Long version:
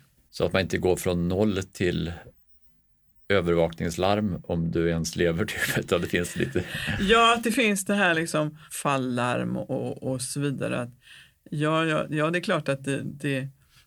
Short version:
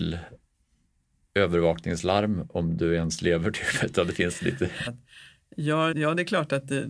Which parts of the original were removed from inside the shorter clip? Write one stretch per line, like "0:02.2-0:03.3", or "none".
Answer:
0:06.8-0:10.8
0:11.9-0:12.1